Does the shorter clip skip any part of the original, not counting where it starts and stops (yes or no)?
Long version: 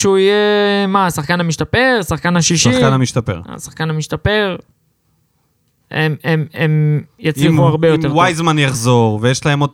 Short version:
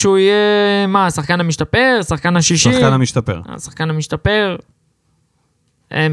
no